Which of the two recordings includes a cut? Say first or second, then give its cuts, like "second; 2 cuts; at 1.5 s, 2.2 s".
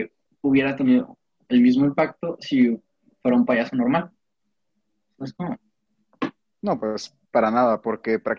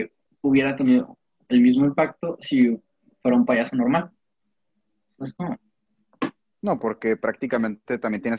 second; 1 cut; at 6.8 s